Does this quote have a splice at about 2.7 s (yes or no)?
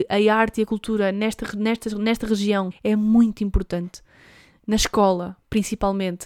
yes